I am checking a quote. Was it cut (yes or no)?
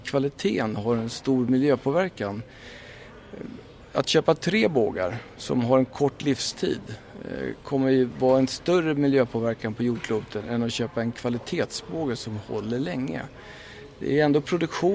no